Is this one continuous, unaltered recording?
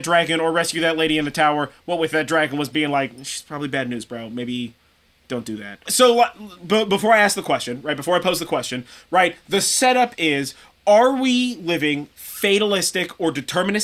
no; 1 cut; at 5.9 s

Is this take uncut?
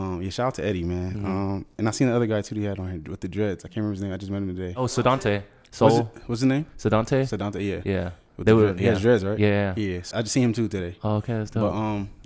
no; 1 cut; at 10.1 s

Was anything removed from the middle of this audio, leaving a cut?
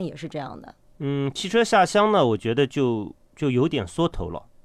no; 0 cuts

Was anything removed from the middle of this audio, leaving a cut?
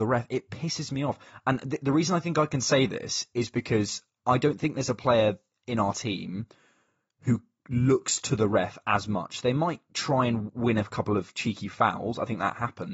no; 0 cuts

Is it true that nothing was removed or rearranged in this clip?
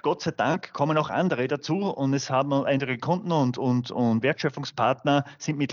no; 1 cut; at 4.2 s

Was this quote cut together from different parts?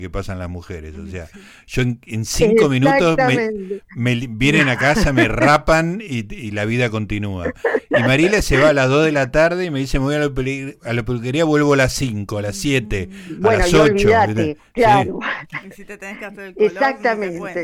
no; 0 cuts

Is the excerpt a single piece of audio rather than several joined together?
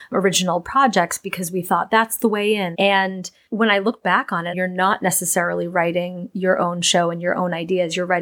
no; 2 cuts; at 2.7 s, 4.5 s

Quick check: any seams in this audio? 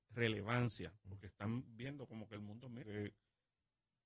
yes; 1 cut; at 2.8 s

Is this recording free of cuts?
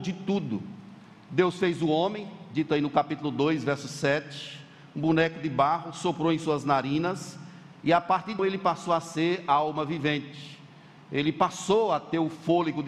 no; 1 cut; at 8.4 s

